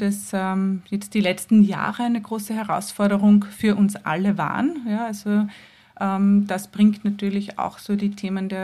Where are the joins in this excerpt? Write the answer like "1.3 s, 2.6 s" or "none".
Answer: none

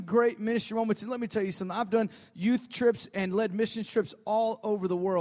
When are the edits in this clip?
none

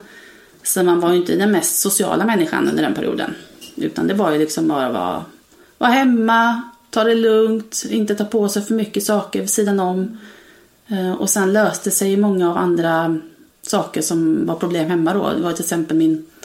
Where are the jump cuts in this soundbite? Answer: none

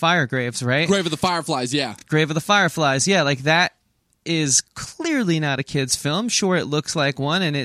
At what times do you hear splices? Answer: none

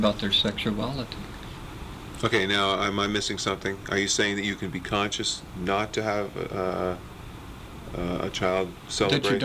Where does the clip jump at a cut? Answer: none

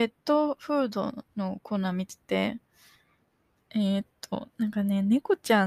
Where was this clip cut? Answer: none

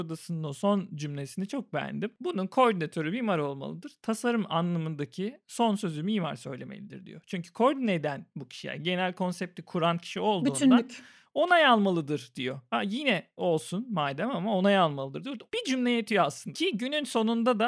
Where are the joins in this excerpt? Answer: 15.5 s, 16.5 s

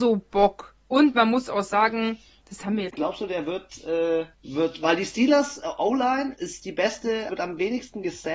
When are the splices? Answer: 2.9 s, 4.3 s, 7.3 s

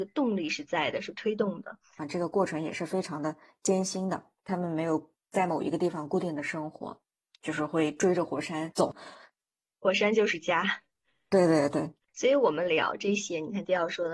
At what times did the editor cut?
2.0 s, 12.0 s

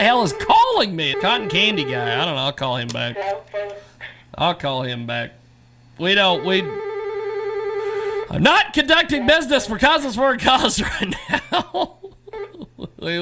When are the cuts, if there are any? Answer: 1.1 s

